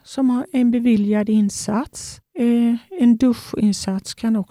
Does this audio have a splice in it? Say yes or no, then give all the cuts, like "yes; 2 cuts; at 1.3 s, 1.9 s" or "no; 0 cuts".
yes; 1 cut; at 2.2 s